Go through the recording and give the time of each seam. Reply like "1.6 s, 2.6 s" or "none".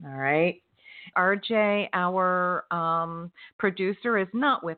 1.1 s

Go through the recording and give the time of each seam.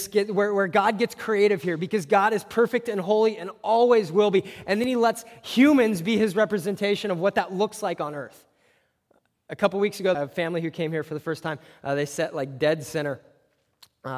10.1 s

